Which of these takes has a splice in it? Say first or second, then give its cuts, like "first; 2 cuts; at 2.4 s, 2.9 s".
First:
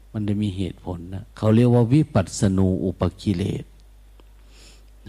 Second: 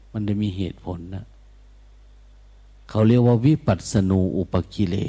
first; 1 cut; at 1.3 s